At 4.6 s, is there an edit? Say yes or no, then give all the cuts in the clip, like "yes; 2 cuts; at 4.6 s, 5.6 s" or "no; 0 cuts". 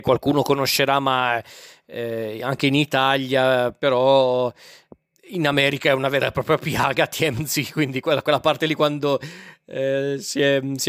no; 0 cuts